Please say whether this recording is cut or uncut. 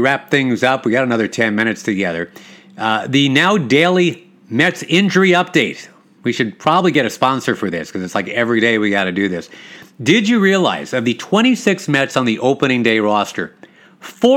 uncut